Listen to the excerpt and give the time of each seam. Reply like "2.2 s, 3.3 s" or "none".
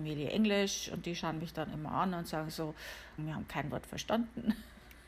3.2 s